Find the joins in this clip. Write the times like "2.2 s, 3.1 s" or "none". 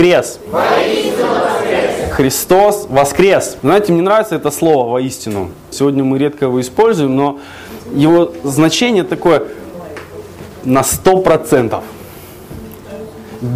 3.6 s, 5.7 s